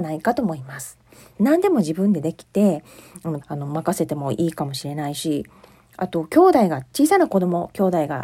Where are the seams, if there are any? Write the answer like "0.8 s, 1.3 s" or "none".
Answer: 1.3 s, 3.4 s